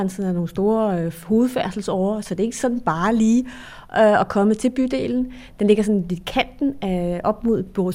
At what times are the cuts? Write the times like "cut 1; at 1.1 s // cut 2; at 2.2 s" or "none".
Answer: none